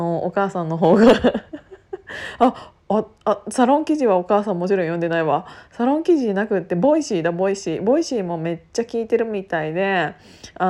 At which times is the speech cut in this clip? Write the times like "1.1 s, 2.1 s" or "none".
2.8 s